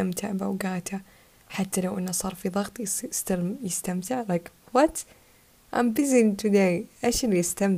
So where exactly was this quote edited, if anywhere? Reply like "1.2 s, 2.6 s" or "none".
none